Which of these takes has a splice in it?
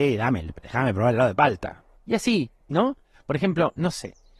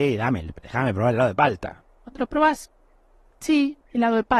first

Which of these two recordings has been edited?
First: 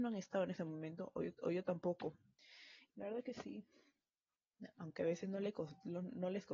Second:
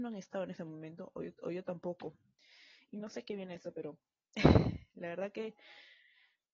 first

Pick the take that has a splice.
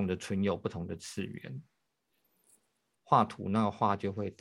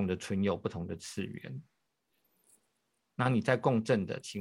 first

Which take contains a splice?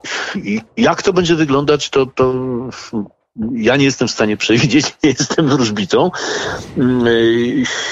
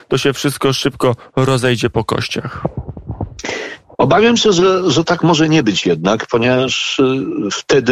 second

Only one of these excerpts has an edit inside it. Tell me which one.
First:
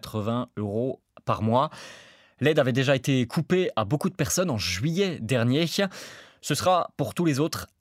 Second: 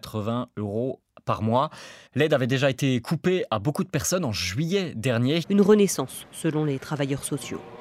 second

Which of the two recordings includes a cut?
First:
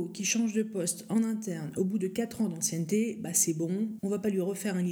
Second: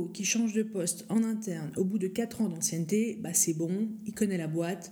first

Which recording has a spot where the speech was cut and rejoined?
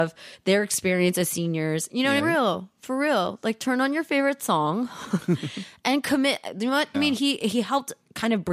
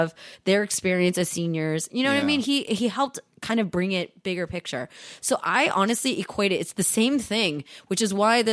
first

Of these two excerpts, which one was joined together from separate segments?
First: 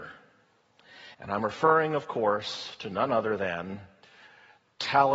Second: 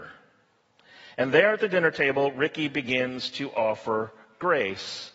first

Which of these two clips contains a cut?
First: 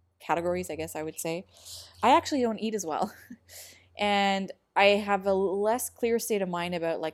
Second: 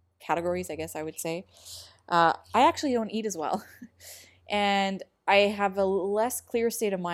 first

